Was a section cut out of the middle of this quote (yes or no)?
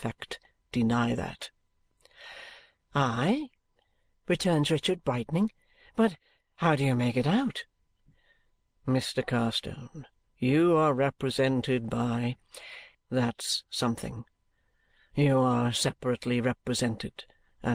yes